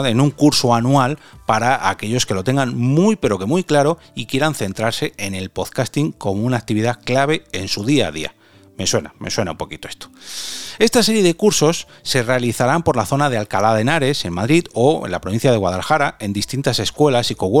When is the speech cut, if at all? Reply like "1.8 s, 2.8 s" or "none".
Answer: 10.8 s